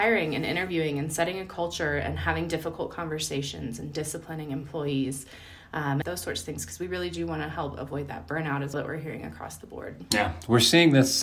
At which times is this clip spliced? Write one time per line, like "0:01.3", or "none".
0:06.0
0:08.7